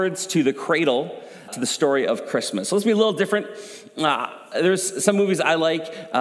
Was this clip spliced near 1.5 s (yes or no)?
yes